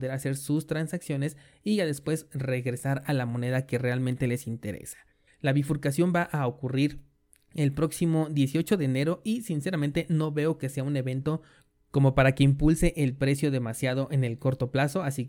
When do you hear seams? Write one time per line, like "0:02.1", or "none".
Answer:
0:05.3